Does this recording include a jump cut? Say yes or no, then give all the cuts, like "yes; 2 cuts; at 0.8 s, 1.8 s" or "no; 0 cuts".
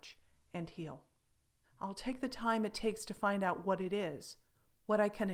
yes; 1 cut; at 1.6 s